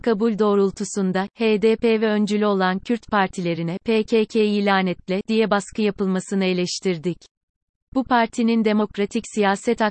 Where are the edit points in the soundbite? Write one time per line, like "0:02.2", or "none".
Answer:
0:01.3